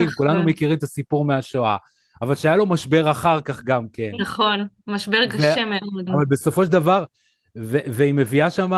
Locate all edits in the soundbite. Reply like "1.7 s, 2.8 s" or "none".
6.1 s